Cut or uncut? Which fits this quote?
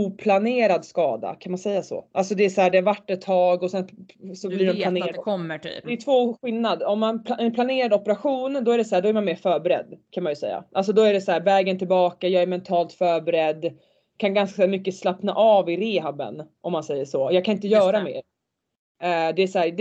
cut